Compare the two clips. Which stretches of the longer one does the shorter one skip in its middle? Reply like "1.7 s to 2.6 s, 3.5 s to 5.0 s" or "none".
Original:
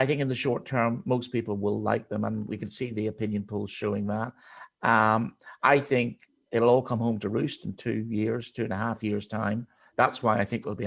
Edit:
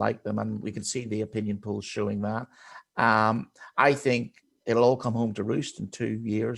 none